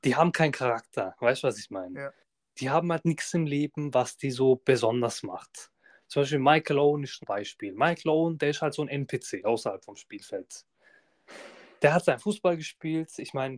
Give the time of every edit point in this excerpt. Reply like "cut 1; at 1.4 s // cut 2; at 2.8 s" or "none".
cut 1; at 7.2 s